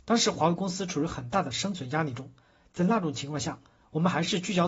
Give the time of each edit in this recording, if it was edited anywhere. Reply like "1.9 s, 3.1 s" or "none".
none